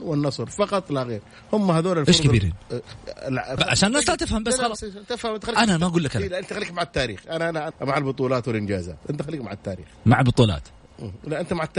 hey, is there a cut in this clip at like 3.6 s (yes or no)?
yes